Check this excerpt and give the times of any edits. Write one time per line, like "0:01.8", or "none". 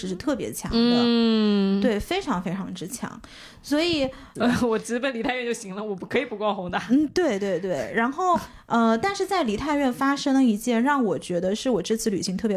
0:04.4